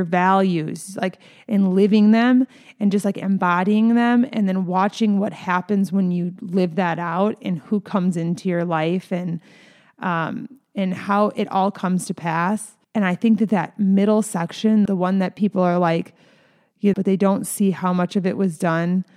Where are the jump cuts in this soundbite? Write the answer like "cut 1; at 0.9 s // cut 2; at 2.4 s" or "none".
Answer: cut 1; at 12.8 s // cut 2; at 14.9 s // cut 3; at 16.9 s